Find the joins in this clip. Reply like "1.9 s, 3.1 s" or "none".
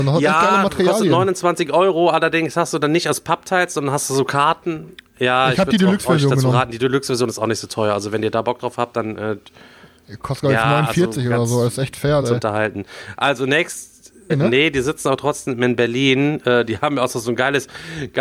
12.2 s, 14.3 s